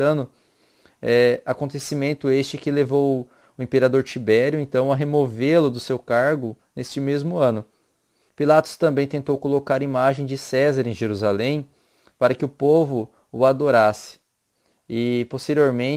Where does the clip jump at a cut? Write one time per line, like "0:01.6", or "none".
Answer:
0:08.3